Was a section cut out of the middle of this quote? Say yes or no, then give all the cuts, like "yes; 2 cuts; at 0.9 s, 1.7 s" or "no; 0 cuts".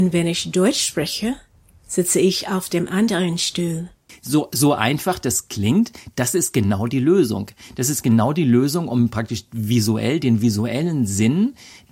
no; 0 cuts